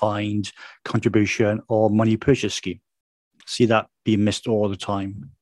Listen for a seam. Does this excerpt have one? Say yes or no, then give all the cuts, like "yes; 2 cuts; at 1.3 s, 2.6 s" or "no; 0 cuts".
yes; 1 cut; at 3.4 s